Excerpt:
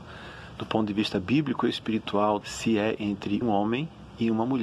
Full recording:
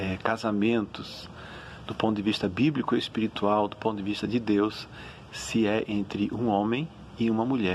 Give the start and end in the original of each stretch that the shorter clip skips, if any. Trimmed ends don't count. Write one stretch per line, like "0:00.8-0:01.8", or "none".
0:03.7-0:05.3
0:06.3-0:06.4